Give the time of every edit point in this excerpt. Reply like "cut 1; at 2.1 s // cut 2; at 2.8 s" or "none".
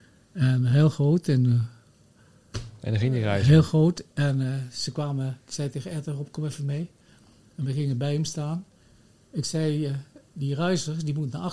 none